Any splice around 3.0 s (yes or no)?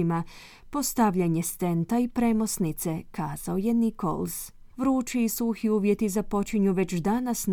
no